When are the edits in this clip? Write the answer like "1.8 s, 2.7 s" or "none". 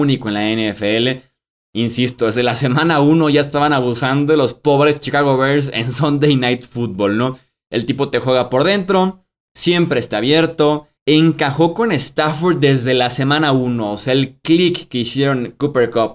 9.5 s, 11.0 s